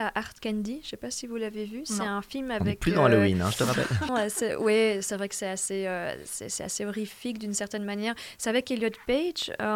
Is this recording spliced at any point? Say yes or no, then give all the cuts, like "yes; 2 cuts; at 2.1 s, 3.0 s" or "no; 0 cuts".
yes; 1 cut; at 4.1 s